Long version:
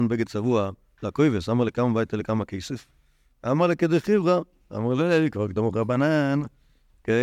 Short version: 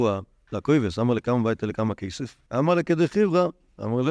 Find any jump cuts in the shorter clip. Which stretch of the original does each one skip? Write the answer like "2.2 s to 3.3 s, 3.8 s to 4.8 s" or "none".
3.0 s to 3.4 s